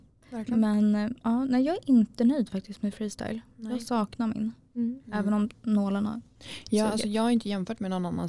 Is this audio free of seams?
yes; 0 cuts

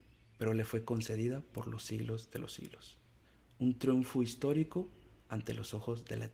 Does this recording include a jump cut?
no; 0 cuts

